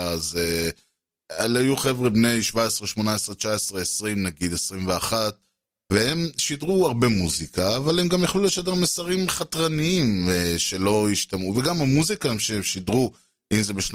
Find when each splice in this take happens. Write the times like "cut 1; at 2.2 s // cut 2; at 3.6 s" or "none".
none